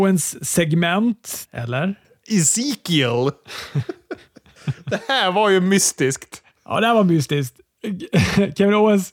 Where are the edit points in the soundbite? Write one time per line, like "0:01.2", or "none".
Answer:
0:01.4

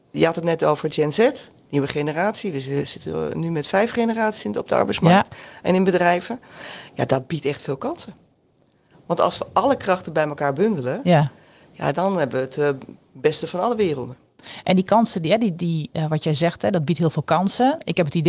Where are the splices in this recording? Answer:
none

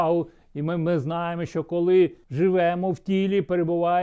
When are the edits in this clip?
0:02.2

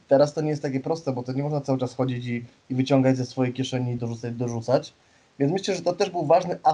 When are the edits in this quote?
0:04.0

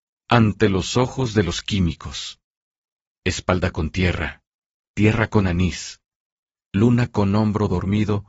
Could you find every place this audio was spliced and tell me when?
none

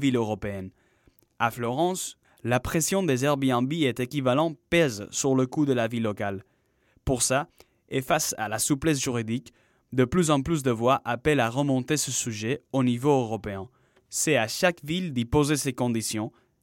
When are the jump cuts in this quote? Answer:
0:02.2
0:14.0

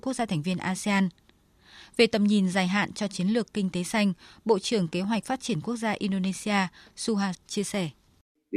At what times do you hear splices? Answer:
0:07.3

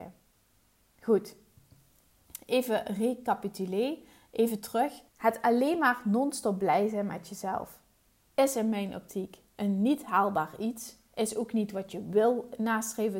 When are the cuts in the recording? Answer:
0:05.1

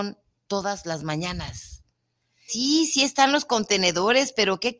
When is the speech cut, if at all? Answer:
0:02.5

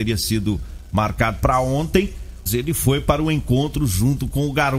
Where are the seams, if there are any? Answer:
0:02.5

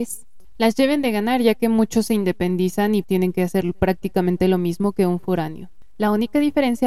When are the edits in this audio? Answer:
0:03.0

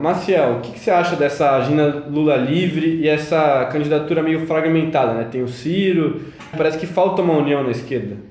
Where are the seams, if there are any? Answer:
0:06.5

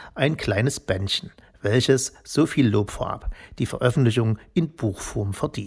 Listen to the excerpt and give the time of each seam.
none

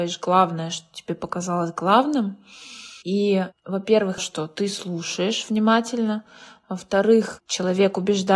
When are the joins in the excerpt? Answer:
0:03.0
0:04.2

